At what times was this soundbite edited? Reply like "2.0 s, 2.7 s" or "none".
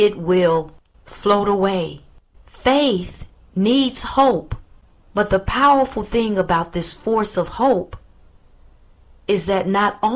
2.4 s